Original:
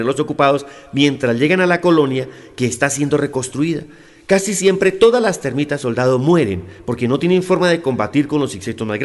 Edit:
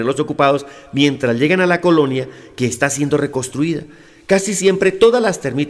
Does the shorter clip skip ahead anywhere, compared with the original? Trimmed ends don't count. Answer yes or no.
no